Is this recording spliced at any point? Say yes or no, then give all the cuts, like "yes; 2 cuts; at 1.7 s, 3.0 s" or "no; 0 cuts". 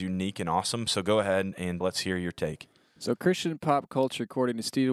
yes; 1 cut; at 1.8 s